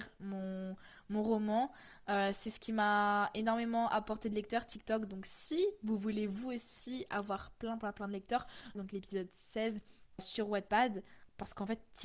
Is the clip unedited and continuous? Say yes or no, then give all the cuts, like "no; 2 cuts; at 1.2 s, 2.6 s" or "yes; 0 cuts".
no; 2 cuts; at 8.7 s, 10.2 s